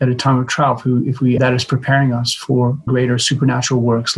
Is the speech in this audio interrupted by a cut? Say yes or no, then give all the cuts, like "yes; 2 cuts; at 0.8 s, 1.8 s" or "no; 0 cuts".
yes; 2 cuts; at 1.4 s, 2.9 s